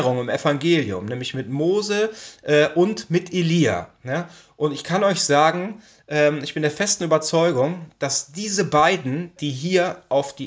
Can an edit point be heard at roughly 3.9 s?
no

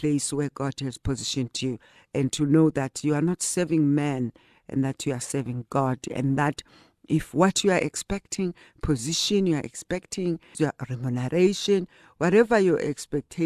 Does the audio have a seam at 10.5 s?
yes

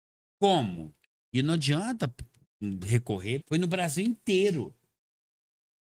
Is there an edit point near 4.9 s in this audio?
no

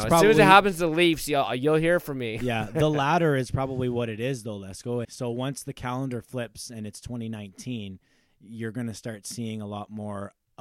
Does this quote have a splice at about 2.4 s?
no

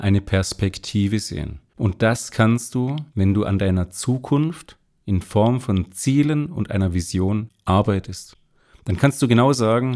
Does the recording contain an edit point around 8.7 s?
no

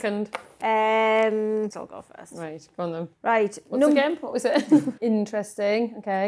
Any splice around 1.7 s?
yes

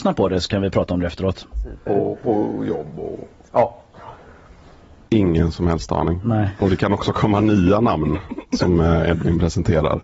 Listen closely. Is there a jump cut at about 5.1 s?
yes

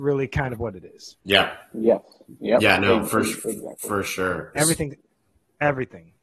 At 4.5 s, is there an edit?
yes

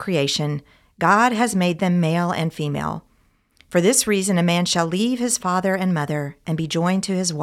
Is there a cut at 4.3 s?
no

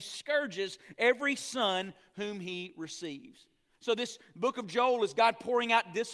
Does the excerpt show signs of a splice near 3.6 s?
no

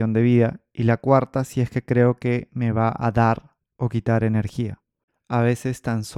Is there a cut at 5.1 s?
yes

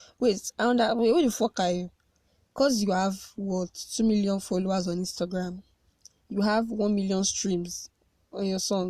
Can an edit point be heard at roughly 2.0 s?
no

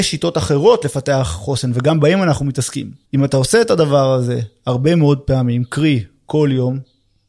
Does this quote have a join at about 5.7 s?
no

